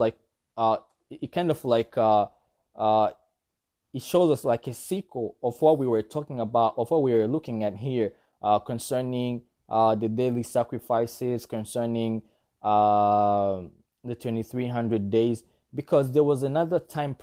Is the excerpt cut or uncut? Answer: uncut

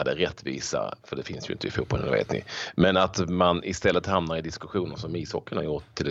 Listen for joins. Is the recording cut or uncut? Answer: uncut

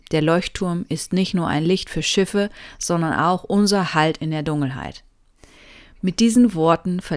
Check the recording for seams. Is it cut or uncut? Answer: uncut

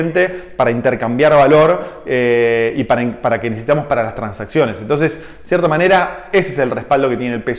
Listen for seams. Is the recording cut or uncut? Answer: uncut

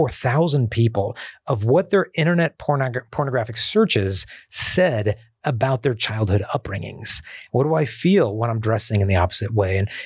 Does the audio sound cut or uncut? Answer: cut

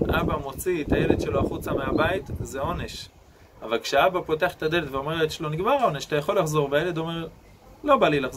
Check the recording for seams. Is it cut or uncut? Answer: uncut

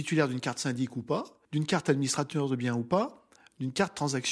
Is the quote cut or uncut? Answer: cut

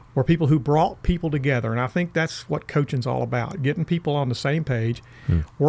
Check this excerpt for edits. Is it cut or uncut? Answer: uncut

